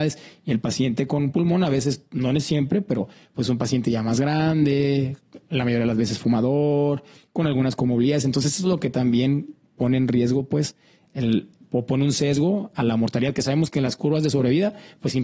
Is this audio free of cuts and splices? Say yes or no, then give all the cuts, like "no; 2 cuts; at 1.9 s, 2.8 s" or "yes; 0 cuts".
yes; 0 cuts